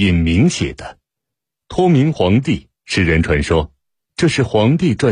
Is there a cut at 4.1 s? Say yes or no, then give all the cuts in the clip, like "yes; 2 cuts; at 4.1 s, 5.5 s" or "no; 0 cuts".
no; 1 cut; at 2.8 s